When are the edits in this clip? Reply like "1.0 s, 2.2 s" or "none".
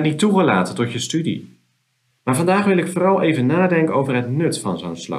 2.1 s